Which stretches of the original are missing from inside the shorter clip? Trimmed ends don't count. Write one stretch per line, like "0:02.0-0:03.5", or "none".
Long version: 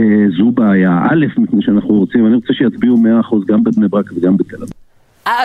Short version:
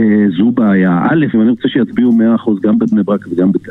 0:01.3-0:02.2

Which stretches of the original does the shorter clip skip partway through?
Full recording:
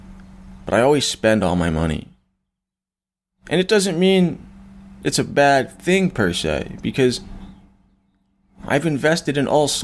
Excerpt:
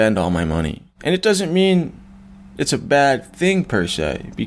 0:02.2-0:03.4

